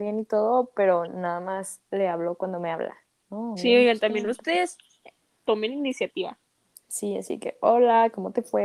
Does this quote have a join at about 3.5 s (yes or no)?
yes